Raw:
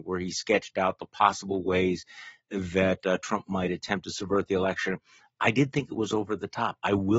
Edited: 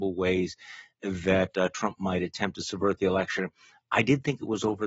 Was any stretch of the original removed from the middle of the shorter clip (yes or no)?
no